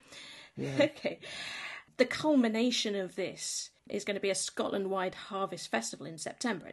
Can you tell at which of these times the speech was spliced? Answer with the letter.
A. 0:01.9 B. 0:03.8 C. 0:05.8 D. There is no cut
B